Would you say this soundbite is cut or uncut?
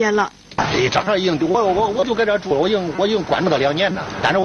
uncut